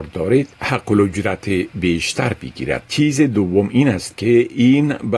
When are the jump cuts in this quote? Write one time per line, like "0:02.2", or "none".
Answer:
0:02.8